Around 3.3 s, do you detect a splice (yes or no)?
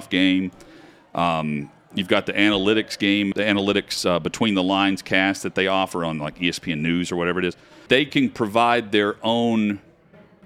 yes